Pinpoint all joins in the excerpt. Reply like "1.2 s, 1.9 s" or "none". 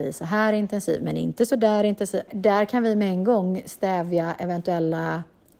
2.3 s